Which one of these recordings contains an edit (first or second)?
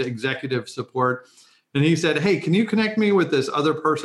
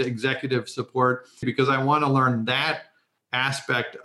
second